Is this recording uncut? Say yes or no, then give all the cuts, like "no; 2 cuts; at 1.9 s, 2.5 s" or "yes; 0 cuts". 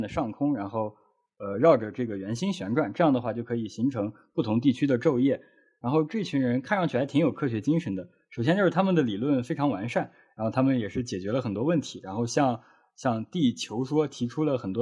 yes; 0 cuts